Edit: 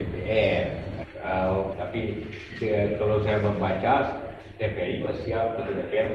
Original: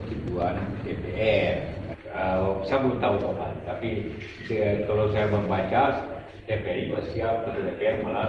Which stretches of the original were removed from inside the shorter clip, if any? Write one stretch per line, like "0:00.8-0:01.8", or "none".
0:02.6-0:03.6